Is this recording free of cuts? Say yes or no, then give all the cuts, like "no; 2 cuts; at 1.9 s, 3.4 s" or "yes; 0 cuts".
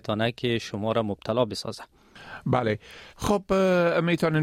no; 1 cut; at 3.1 s